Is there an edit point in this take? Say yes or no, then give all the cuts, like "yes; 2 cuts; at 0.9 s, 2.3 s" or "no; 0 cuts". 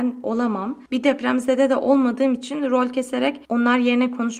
no; 0 cuts